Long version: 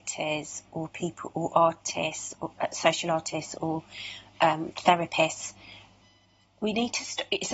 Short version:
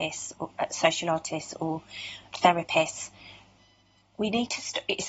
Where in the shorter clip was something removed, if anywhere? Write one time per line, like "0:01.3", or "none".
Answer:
0:02.3